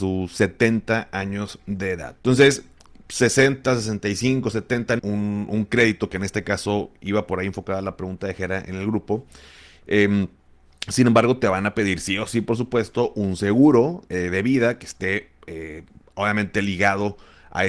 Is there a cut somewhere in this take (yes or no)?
yes